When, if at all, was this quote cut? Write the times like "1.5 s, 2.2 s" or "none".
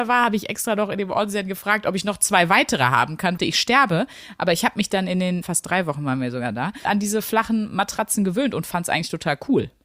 3.4 s, 5.4 s, 6.9 s